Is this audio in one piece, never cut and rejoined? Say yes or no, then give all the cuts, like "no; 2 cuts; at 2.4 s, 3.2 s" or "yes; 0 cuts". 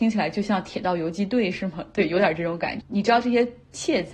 no; 1 cut; at 2.8 s